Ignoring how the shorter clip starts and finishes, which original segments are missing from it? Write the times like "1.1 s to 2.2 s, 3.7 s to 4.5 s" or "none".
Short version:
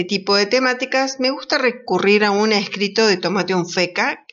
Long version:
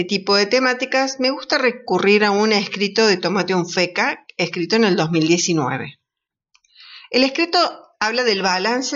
none